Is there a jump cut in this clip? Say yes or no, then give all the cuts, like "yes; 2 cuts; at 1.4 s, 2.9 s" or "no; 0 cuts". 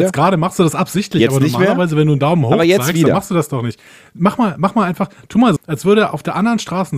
yes; 1 cut; at 5.6 s